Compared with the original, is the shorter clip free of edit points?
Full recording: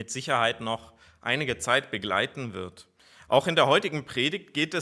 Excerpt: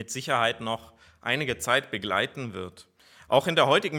yes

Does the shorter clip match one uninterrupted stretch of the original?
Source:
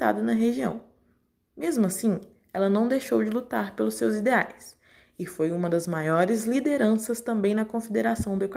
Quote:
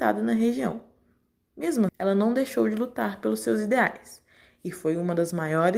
no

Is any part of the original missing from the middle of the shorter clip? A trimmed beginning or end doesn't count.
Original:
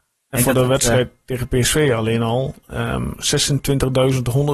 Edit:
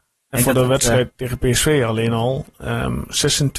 yes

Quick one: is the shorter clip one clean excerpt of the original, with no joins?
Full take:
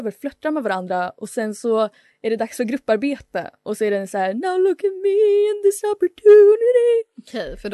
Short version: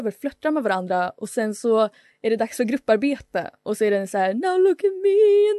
yes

